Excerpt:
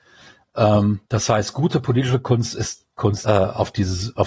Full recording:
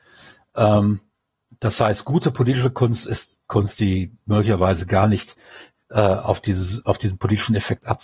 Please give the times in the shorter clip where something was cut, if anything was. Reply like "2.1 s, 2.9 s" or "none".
1.0 s, 3.2 s